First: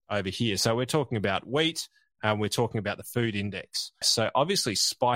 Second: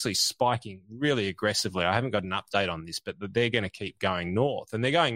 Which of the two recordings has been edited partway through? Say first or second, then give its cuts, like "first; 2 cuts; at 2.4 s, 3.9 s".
first; 1 cut; at 4.0 s